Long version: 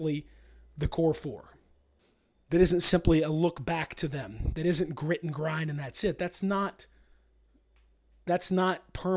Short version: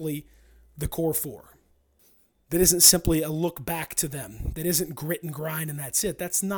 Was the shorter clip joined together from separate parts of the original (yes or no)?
no